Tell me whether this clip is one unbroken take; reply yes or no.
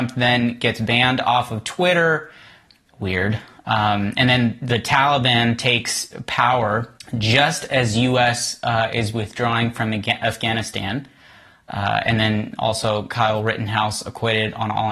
yes